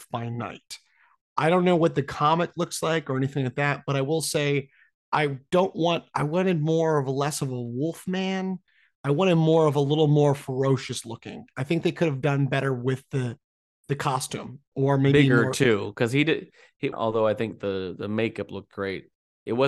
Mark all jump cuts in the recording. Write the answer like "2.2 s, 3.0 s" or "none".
16.9 s